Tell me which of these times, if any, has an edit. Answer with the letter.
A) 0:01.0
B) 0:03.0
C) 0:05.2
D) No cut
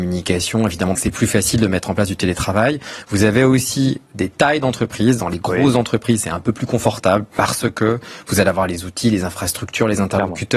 A